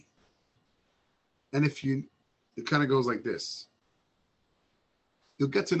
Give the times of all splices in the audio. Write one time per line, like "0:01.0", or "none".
0:02.5